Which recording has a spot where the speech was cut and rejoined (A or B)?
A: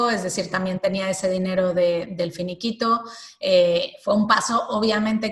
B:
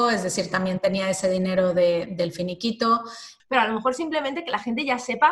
B